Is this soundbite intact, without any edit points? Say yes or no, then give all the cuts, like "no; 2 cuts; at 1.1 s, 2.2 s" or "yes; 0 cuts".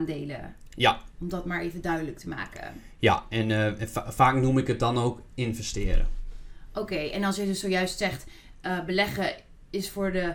yes; 0 cuts